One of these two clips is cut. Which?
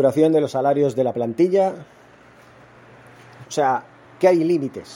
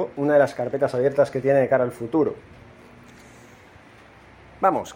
first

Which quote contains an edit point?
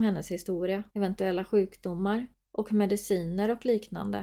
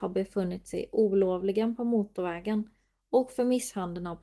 first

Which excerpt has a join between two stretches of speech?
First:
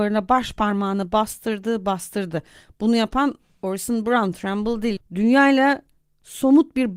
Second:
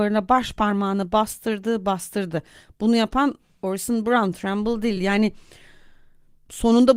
first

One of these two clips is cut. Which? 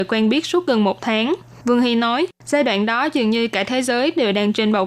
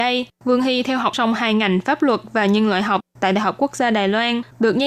second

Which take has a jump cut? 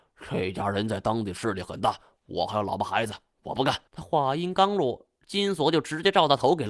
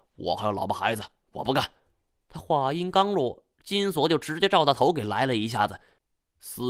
first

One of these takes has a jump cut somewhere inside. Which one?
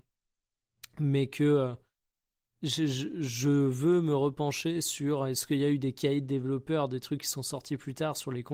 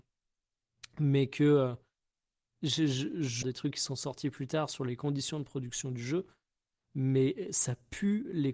second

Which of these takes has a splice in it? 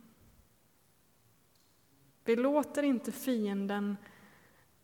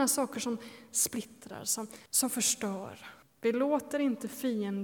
second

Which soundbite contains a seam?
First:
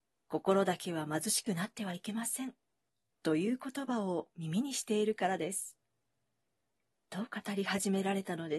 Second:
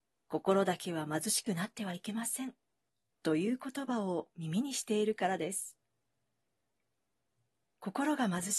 first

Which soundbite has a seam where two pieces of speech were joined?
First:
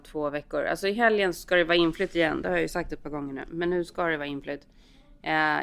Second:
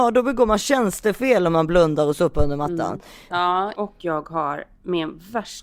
second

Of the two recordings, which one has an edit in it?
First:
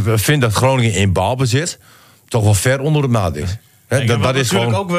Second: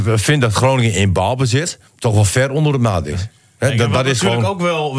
second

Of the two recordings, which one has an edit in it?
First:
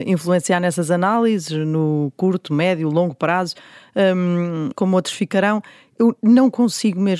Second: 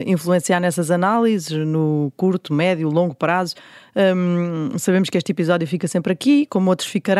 first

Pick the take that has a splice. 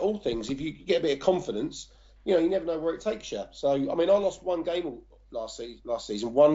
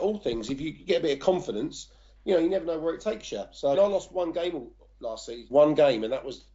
second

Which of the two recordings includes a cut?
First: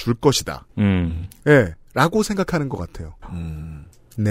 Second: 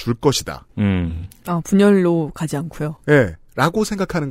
first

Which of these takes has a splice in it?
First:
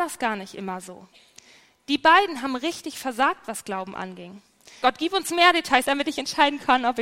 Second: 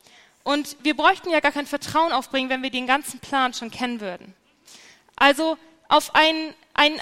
first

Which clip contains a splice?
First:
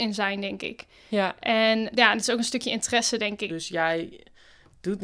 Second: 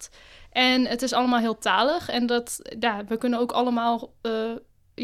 first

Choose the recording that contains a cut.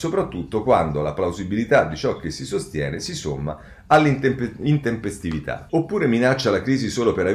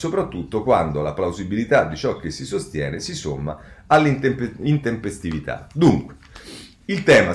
first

